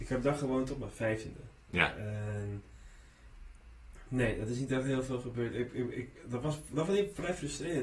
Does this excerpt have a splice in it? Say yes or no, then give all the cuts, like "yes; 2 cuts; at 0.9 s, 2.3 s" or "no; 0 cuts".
no; 0 cuts